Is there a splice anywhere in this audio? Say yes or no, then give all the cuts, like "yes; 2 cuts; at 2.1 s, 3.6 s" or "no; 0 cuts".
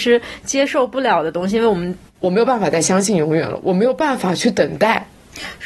yes; 1 cut; at 2.1 s